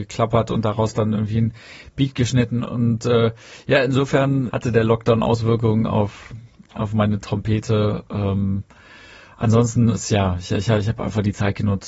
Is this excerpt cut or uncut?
uncut